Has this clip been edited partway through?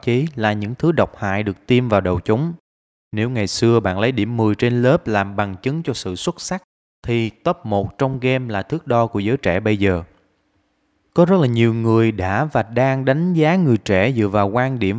no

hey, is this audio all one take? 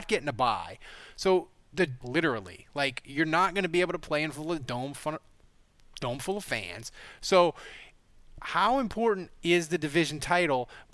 no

